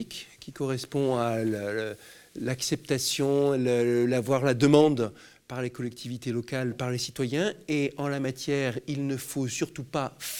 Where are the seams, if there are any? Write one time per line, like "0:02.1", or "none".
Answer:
none

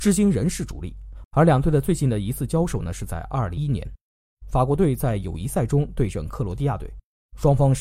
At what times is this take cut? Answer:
0:01.2
0:03.6

